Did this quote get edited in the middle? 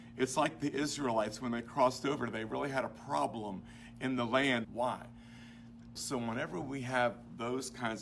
yes; 2 cuts; at 4.6 s, 6.0 s

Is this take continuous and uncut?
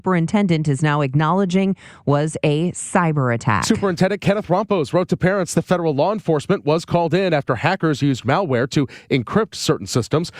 yes; 0 cuts

